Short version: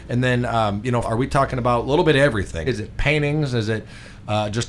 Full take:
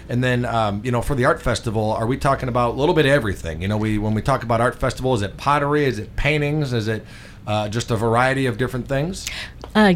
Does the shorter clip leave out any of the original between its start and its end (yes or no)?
yes